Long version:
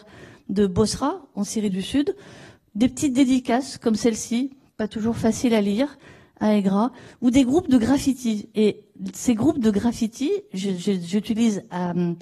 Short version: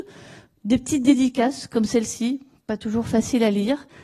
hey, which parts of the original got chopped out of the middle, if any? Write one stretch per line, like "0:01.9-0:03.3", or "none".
none